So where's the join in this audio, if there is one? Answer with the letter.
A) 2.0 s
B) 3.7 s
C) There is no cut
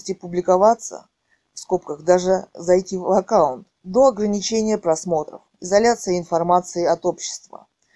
B